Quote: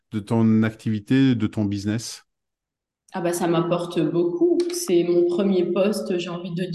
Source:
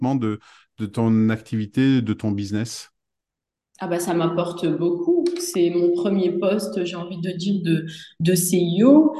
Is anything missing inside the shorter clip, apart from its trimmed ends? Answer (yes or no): no